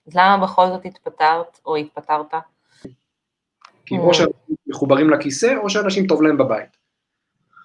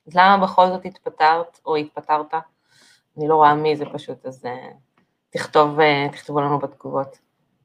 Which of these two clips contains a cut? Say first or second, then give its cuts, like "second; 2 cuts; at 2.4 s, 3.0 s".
first; 1 cut; at 2.8 s